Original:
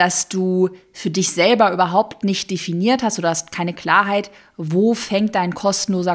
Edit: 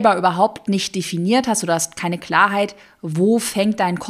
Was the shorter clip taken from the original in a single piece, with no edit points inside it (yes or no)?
yes